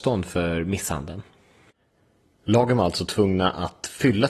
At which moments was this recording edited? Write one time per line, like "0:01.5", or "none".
none